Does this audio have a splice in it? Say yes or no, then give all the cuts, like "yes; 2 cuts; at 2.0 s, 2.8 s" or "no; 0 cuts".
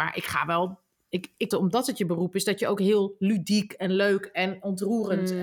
yes; 1 cut; at 1.5 s